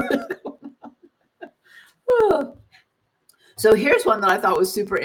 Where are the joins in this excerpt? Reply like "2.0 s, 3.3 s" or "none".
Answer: none